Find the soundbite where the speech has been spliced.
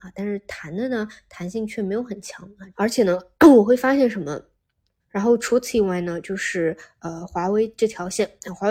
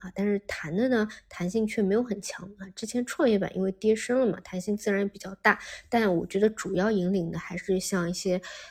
first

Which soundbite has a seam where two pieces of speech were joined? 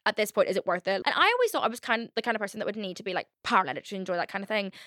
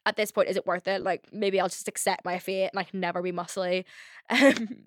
first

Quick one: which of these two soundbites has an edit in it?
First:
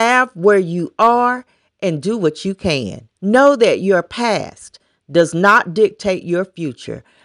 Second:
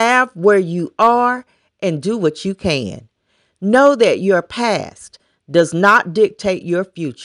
first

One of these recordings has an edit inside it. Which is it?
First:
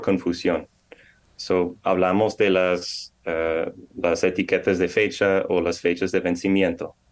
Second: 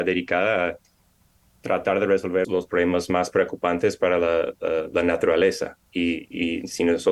second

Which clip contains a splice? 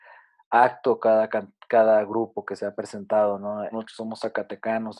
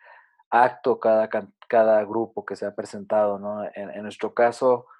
first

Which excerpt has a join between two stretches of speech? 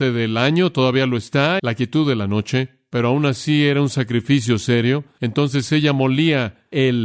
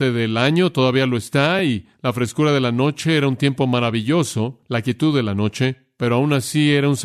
first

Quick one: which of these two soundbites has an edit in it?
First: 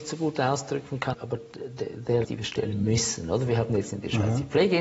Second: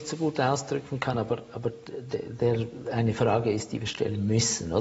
first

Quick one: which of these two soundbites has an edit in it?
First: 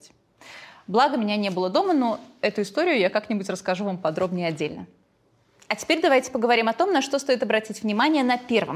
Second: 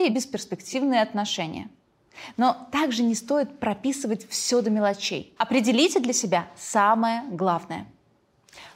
second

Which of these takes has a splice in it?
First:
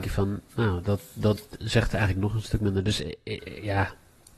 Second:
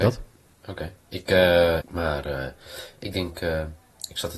second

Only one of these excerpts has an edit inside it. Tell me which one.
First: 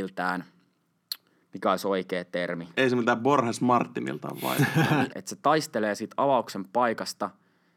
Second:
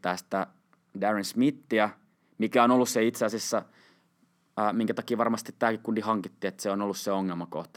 first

